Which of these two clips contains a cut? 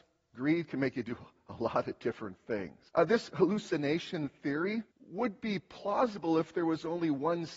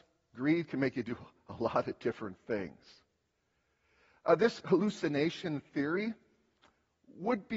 first; 2 cuts; at 2.9 s, 4.9 s

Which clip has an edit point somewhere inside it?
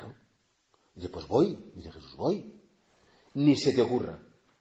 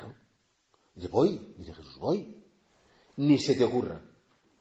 second; 1 cut; at 1.1 s

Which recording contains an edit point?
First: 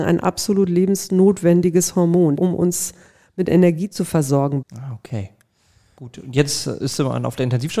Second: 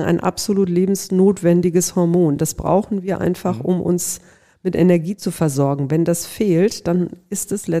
first; 2 cuts; at 2.4 s, 4.6 s

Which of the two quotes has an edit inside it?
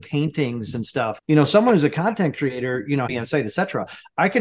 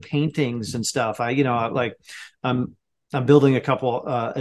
first; 2 cuts; at 1.2 s, 3.1 s

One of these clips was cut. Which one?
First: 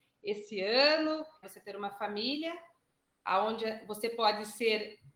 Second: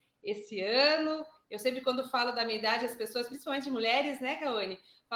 first; 1 cut; at 1.4 s

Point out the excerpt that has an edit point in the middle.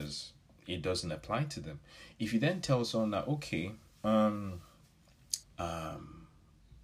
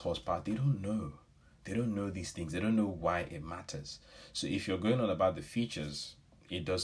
first; 1 cut; at 5.4 s

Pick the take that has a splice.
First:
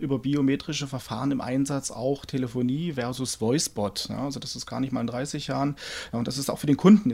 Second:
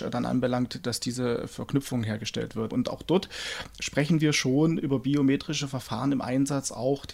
second; 1 cut; at 2.7 s

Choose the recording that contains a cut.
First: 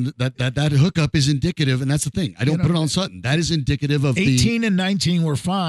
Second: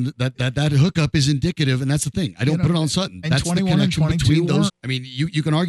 second; 2 cuts; at 3.2 s, 4.7 s

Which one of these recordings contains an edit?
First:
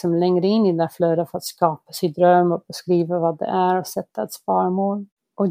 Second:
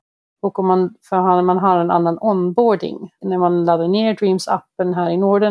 second; 1 cut; at 3.2 s

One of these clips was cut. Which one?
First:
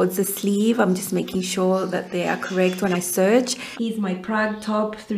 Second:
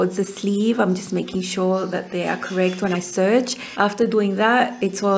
first; 1 cut; at 3.8 s

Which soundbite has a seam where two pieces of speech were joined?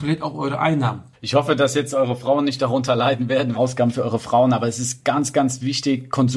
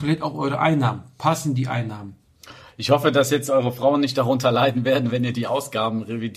first; 2 cuts; at 1.1 s, 3.5 s

